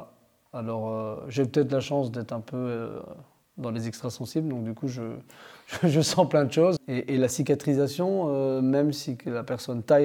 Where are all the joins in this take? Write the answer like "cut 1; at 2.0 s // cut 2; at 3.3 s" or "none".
cut 1; at 6.8 s